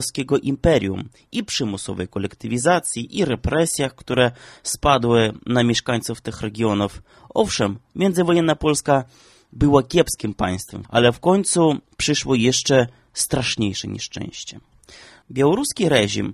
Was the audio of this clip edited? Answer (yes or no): yes